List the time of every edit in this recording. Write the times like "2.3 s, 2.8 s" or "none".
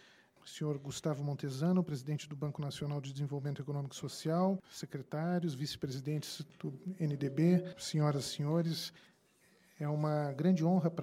4.6 s

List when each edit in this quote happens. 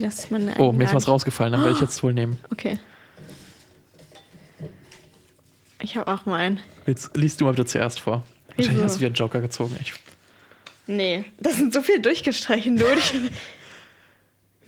none

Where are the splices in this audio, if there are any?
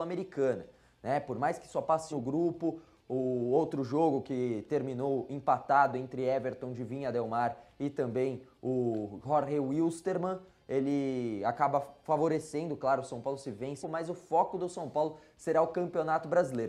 2.1 s, 13.8 s

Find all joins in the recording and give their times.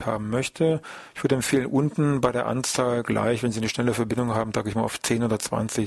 none

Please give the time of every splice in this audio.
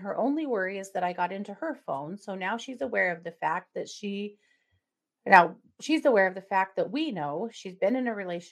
none

